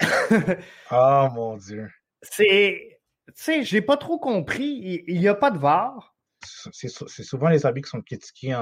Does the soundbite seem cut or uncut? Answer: cut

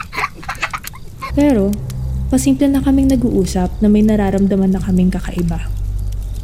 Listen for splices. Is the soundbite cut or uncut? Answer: cut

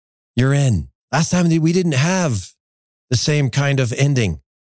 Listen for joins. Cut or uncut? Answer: cut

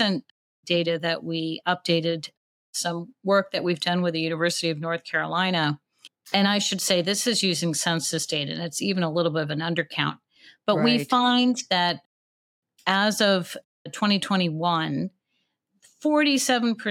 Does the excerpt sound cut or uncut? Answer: uncut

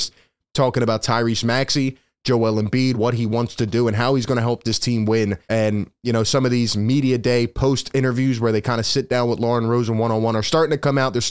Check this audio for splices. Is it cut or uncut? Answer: cut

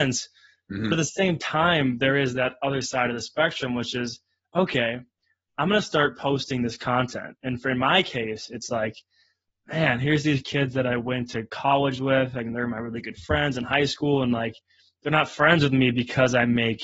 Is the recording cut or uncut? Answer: uncut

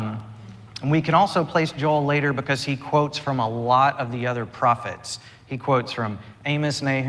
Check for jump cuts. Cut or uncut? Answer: uncut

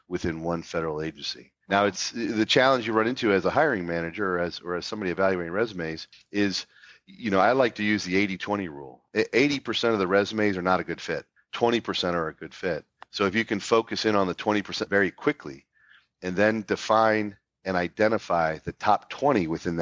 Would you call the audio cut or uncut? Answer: uncut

